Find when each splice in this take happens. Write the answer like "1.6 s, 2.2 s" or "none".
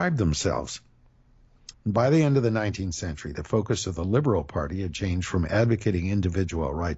1.7 s